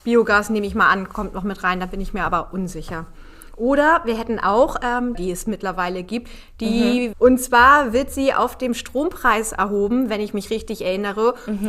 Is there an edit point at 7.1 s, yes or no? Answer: yes